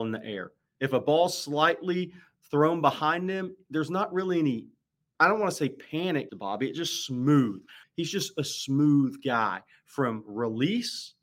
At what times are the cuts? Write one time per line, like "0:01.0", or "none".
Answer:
0:06.3
0:07.8